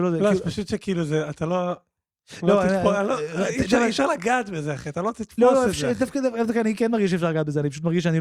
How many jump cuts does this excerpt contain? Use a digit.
0